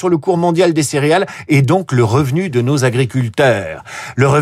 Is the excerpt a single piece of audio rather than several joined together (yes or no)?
yes